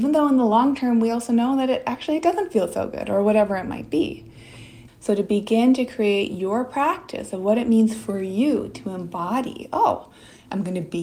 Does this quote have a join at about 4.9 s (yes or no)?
yes